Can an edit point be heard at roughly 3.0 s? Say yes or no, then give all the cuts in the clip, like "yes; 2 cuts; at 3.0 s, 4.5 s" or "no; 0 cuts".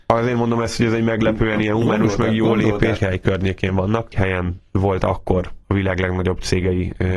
yes; 2 cuts; at 3.0 s, 4.1 s